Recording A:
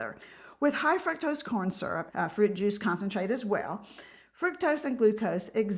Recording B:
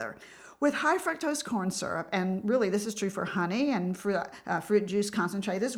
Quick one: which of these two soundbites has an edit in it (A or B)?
A